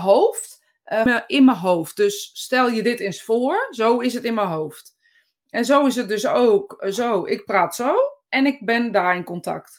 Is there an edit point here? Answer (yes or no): yes